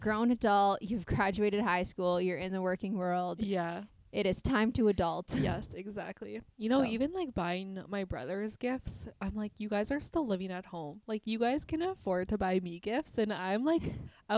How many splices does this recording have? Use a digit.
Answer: 0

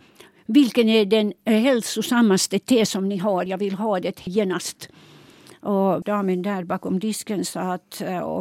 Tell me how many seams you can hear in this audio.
0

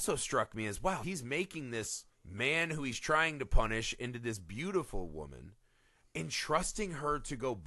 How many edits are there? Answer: 2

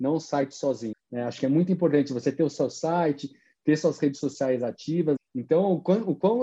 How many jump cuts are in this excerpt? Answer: 2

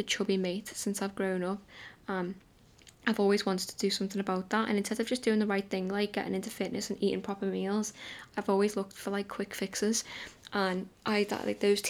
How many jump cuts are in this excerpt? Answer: 1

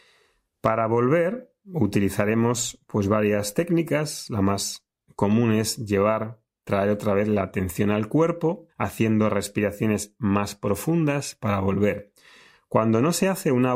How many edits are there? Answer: 1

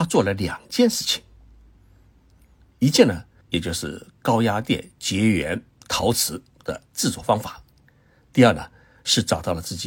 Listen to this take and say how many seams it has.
1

